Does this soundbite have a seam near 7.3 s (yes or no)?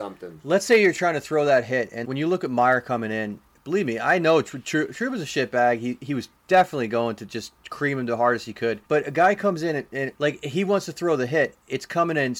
no